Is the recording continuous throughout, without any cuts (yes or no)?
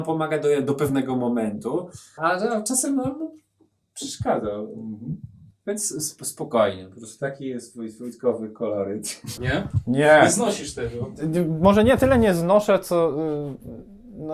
no